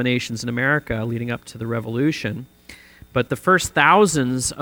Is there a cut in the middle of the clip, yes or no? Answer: no